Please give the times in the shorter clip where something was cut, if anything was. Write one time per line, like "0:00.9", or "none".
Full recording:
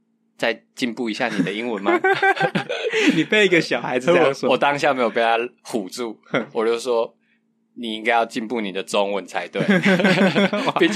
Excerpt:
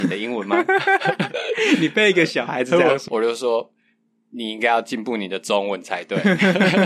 0:03.1